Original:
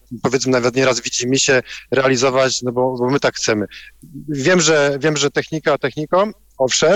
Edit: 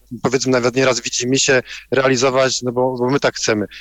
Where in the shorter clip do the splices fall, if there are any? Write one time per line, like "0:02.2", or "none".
none